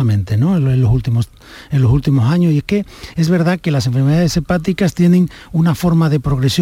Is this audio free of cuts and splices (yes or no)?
yes